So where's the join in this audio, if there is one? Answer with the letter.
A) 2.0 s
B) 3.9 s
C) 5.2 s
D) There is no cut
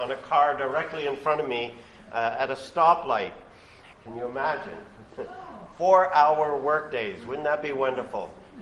B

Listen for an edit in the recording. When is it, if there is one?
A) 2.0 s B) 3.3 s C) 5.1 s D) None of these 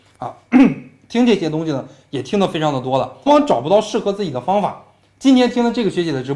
B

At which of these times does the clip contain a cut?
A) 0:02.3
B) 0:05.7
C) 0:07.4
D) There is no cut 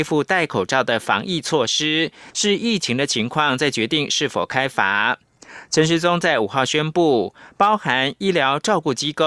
A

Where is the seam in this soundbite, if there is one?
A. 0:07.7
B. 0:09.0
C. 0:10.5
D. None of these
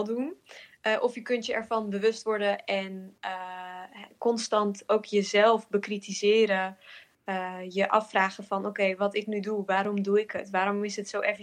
D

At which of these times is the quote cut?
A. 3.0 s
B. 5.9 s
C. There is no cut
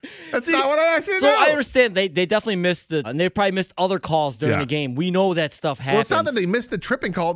A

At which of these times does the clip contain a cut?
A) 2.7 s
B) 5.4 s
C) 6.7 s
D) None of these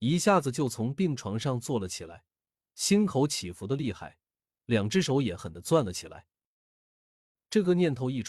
B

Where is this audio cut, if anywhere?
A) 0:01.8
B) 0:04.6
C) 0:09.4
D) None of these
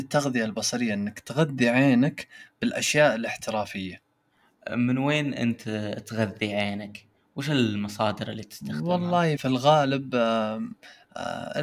C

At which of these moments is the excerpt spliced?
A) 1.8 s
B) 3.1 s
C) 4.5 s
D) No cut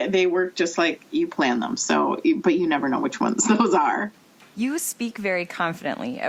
C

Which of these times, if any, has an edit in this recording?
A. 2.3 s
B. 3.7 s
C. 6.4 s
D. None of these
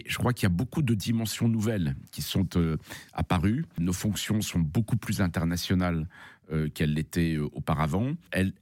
D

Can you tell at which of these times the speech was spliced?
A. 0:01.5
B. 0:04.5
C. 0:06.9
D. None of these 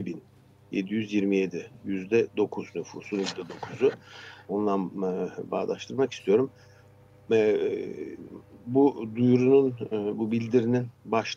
B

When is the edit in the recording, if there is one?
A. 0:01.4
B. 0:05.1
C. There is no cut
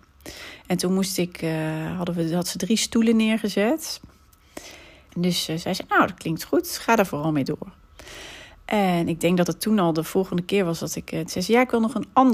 B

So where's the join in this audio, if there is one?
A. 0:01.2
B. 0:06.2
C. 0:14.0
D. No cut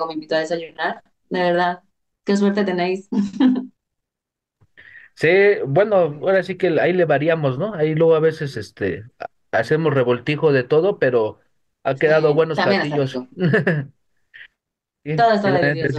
A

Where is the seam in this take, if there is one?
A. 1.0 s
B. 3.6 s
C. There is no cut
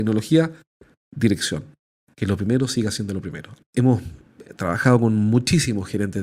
B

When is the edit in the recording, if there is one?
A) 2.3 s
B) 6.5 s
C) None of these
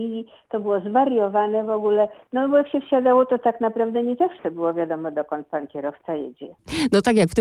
C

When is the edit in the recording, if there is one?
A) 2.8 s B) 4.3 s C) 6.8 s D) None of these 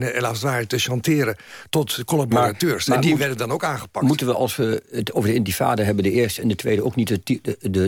D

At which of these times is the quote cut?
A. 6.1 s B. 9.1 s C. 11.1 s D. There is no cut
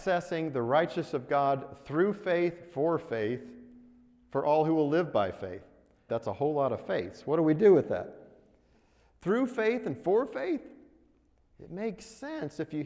A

